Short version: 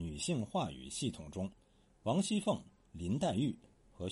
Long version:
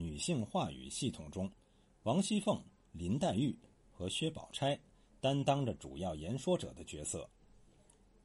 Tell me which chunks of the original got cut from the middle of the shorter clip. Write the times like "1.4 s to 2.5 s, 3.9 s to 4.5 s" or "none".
none